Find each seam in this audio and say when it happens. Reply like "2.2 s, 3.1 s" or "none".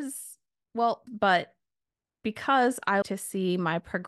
1.1 s, 3.0 s